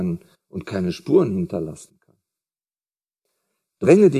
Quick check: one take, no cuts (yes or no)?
yes